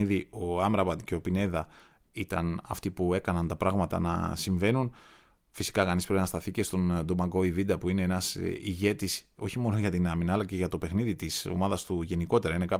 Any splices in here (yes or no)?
no